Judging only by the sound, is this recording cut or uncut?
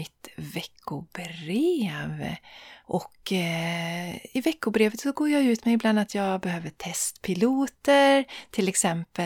cut